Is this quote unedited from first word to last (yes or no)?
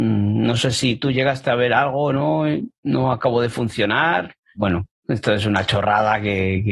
no